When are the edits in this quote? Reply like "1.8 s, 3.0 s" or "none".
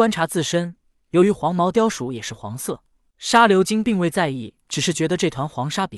3.1 s, 4.6 s